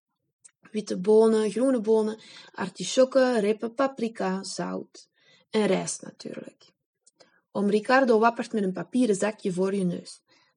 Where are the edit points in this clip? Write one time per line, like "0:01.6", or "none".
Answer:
none

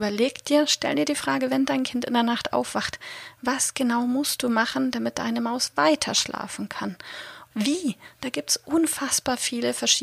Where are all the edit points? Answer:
0:07.5

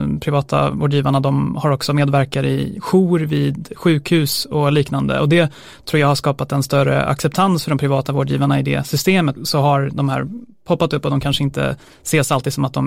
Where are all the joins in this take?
0:09.4

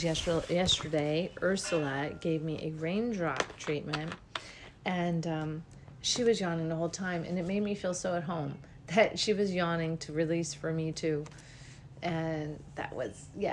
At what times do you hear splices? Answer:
none

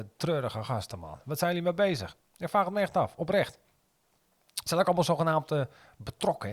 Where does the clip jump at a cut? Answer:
none

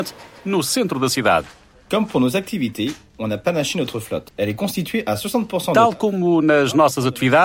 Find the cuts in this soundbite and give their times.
0:04.3

